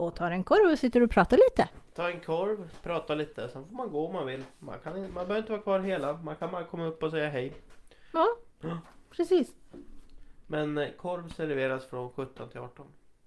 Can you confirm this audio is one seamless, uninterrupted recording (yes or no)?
yes